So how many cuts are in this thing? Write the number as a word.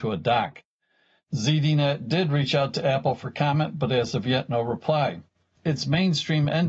one